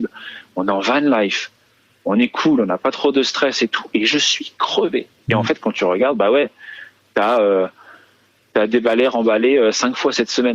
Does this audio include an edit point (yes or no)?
no